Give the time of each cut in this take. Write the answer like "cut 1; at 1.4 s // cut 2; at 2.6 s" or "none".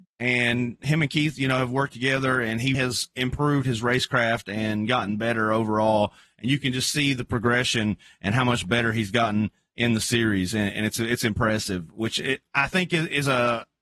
cut 1; at 2.7 s